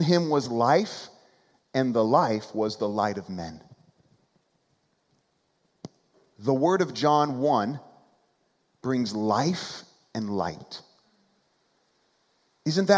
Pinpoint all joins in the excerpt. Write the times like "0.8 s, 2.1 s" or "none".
none